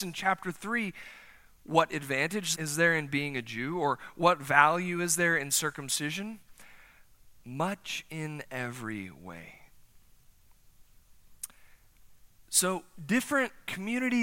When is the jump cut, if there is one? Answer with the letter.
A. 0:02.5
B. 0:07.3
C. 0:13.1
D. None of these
A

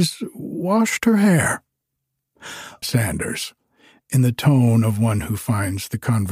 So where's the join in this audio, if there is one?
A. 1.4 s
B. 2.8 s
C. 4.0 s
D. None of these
B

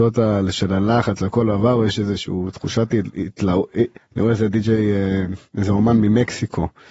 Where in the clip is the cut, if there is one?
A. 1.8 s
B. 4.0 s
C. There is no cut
B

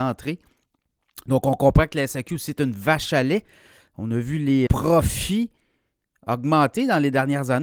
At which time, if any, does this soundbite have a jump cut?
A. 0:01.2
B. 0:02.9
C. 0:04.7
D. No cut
C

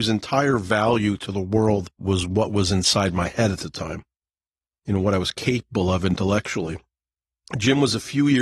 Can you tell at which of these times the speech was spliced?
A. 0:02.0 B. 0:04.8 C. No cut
A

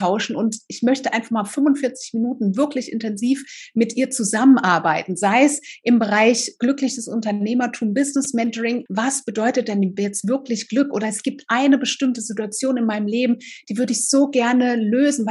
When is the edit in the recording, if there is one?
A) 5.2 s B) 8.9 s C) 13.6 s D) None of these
B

